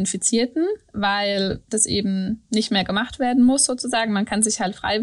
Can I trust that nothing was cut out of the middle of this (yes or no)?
yes